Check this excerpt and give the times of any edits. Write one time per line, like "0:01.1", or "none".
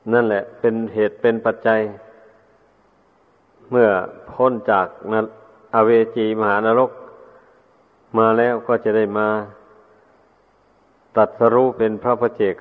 none